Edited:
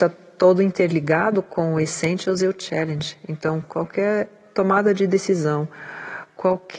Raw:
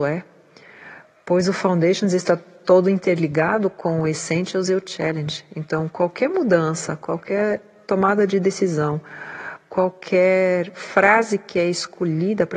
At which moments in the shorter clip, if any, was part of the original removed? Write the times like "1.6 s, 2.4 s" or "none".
3.6 s